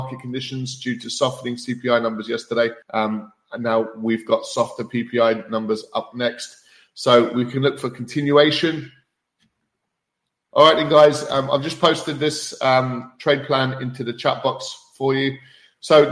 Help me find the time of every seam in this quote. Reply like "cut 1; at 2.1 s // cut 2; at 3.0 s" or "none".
cut 1; at 2.8 s // cut 2; at 10.5 s